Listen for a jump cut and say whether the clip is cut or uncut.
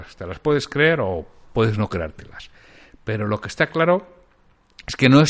uncut